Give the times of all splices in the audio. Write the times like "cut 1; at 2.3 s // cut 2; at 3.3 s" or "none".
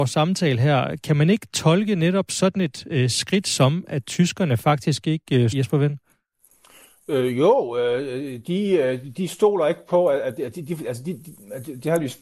cut 1; at 5.5 s